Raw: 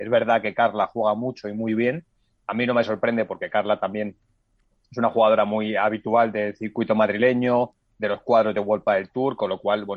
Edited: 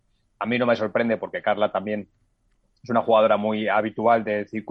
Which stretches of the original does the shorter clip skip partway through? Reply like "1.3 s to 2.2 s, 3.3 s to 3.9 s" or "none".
none